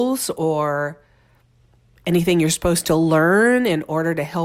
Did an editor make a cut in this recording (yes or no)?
no